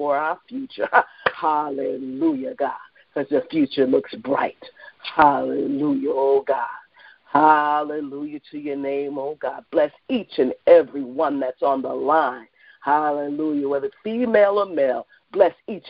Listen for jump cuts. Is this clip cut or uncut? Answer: uncut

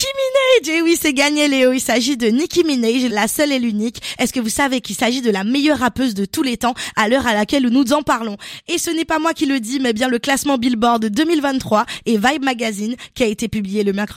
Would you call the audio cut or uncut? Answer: cut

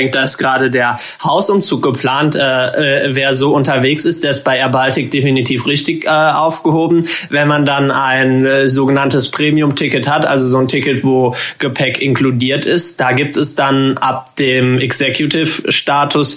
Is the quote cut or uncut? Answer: uncut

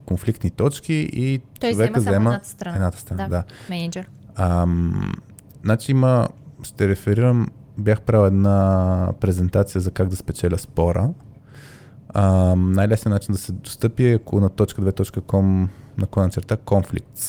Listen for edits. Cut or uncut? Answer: uncut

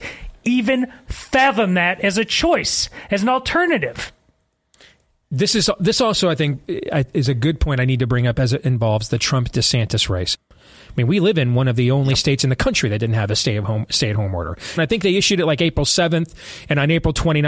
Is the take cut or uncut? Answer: cut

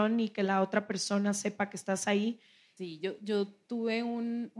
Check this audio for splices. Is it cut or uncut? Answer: cut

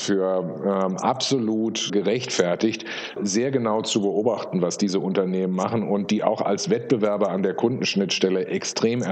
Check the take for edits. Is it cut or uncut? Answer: cut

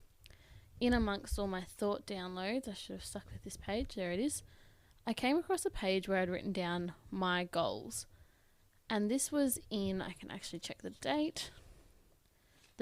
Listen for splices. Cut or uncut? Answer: uncut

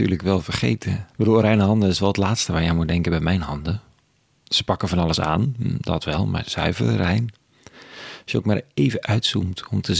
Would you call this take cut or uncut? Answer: cut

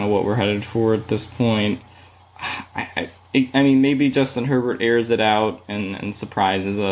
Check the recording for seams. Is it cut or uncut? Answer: uncut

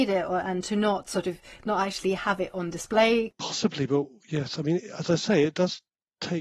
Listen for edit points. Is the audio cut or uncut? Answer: cut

